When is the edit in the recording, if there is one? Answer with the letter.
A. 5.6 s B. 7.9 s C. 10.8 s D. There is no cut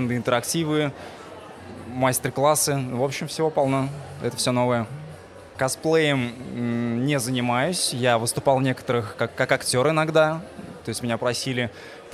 A